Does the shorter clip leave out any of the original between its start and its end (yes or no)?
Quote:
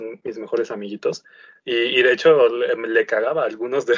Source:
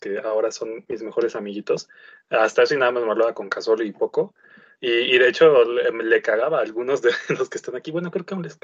yes